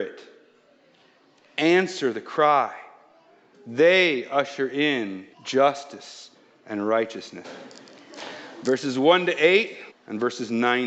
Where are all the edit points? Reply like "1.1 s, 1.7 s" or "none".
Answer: 5.3 s, 7.4 s, 9.9 s